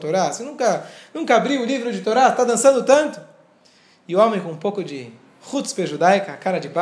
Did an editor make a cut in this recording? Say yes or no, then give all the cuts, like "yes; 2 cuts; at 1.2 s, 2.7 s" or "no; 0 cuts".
no; 0 cuts